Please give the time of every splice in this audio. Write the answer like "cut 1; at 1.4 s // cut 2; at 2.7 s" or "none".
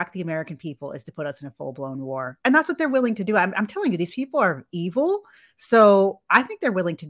none